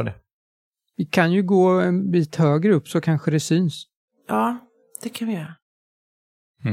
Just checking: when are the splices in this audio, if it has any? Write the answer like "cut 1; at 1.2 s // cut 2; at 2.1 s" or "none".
none